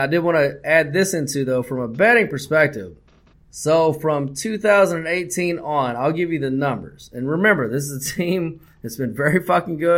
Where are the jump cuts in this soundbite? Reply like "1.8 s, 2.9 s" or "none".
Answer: 3.3 s